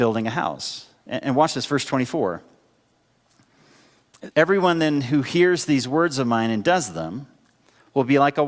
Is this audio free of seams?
no; 1 cut; at 4.3 s

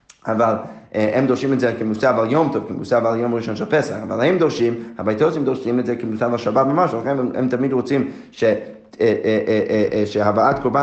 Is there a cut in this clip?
no; 0 cuts

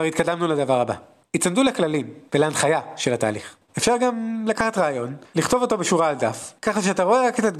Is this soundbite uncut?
no; 2 cuts; at 3.7 s, 6.6 s

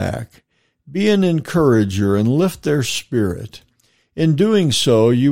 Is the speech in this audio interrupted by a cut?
no; 0 cuts

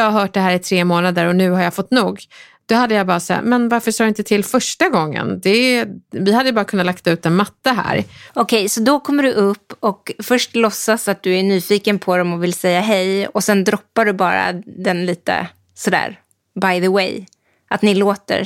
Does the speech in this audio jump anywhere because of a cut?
yes; 1 cut; at 8.3 s

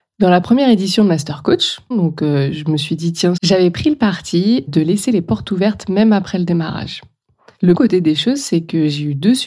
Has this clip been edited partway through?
yes; 3 cuts; at 1.9 s, 3.4 s, 7.7 s

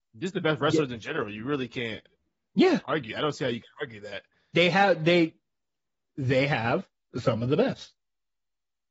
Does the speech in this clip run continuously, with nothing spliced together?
yes; 0 cuts

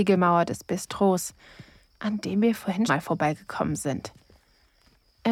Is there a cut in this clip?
yes; 1 cut; at 2.9 s

